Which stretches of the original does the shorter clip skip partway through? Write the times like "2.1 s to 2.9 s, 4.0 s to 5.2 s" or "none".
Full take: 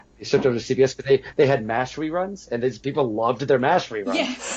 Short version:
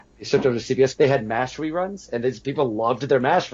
0.9 s to 1.3 s